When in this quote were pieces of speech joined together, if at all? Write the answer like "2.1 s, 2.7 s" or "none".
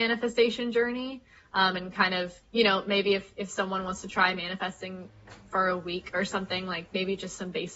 2.4 s